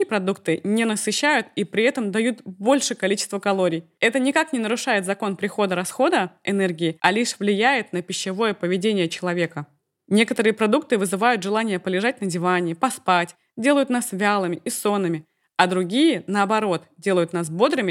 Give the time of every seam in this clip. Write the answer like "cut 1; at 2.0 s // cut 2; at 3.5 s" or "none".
none